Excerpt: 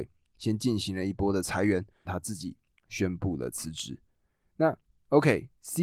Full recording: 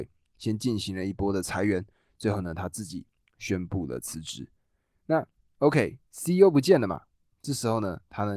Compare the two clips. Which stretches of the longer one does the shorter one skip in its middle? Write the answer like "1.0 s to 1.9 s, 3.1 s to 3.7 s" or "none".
2.1 s to 2.5 s

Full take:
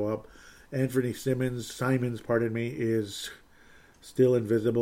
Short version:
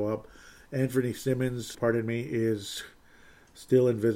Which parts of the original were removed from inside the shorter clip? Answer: 1.7 s to 2.2 s

